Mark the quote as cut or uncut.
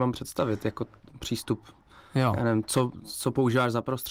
uncut